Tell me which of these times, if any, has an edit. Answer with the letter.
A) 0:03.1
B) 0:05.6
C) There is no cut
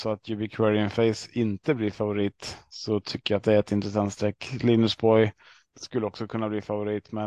B